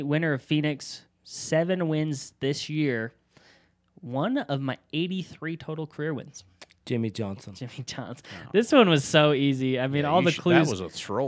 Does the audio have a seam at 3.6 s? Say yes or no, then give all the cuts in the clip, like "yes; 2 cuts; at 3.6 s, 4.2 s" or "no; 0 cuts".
no; 0 cuts